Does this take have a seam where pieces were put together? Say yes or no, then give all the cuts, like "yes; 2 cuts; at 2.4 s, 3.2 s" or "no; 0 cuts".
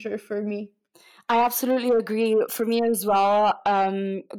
no; 0 cuts